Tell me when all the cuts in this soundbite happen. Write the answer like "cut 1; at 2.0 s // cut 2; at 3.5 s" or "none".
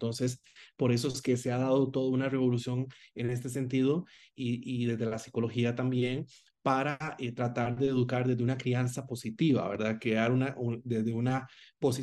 none